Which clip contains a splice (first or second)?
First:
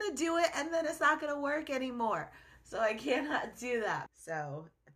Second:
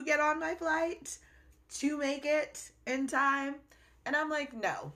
first